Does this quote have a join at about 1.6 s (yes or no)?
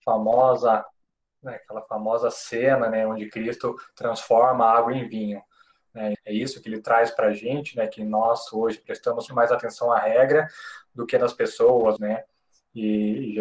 no